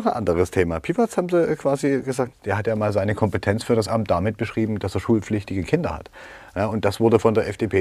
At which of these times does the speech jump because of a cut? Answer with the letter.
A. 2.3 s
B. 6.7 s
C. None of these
A